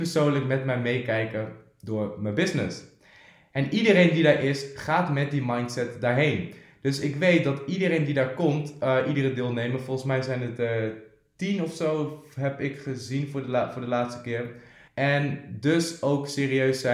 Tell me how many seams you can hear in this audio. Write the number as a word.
one